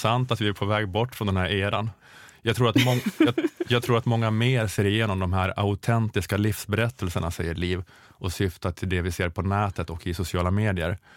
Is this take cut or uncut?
uncut